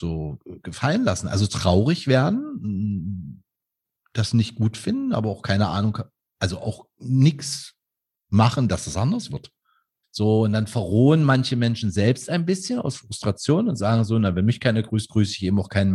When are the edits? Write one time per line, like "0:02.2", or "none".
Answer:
0:10.0

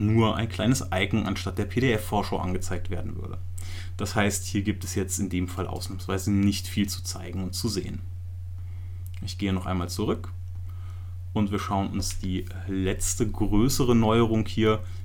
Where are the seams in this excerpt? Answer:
none

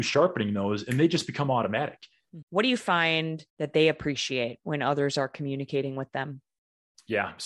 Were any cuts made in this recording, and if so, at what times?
0:02.4
0:03.5

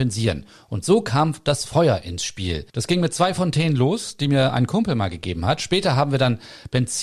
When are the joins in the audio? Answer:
0:02.7

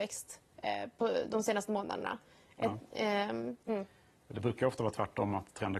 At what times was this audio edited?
0:03.7

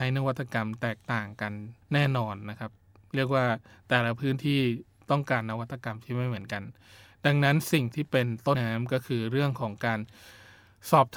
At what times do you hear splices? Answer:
0:01.8
0:08.5

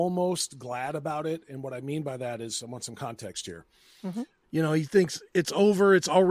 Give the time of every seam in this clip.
0:04.4

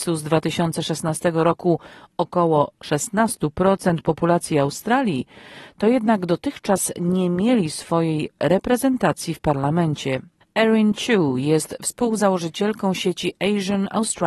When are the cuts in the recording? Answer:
0:10.4

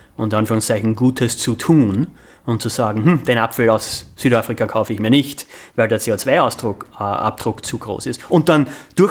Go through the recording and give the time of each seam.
none

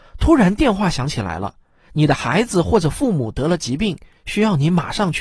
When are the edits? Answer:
none

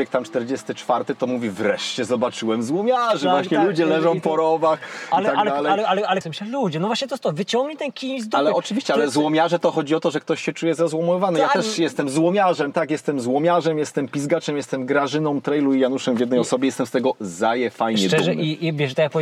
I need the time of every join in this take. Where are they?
0:06.2

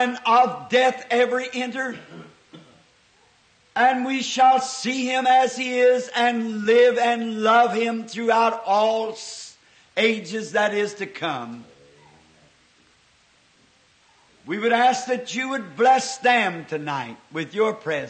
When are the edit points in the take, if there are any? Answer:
0:14.3

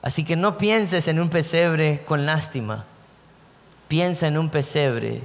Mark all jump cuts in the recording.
none

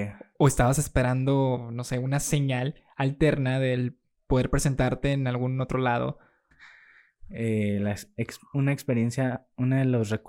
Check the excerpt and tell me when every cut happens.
0:06.5

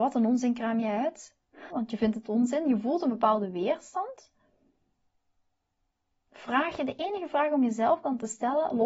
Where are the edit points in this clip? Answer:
0:01.7

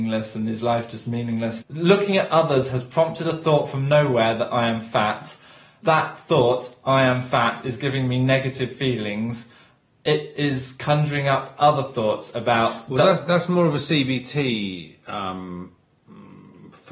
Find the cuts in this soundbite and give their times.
0:01.6

